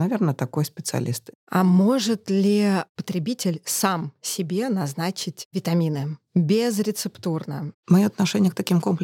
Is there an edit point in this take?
yes; 1 cut; at 7.7 s

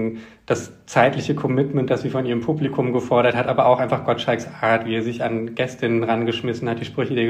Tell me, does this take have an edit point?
no; 0 cuts

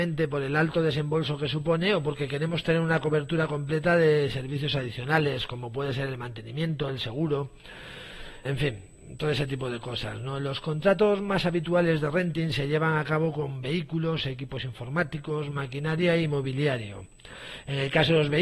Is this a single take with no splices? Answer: no; 1 cut; at 8.4 s

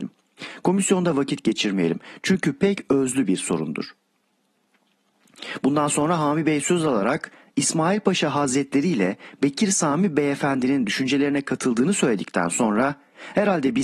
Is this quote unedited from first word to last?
yes; 0 cuts

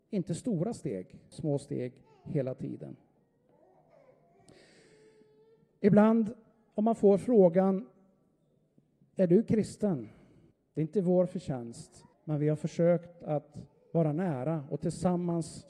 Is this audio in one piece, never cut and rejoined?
no; 3 cuts; at 1.3 s, 10.5 s, 12.1 s

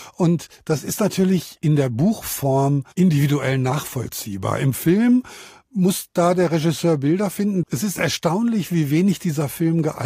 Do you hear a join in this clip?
yes; 1 cut; at 7.6 s

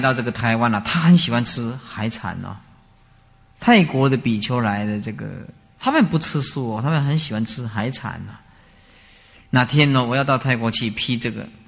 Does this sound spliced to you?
no; 0 cuts

